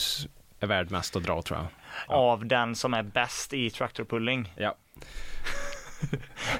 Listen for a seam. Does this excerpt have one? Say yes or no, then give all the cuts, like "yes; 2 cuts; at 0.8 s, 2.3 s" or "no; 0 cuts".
yes; 1 cut; at 2.1 s